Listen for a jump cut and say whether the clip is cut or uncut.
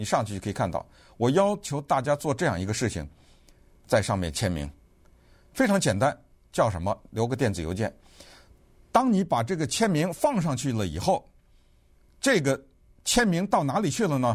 uncut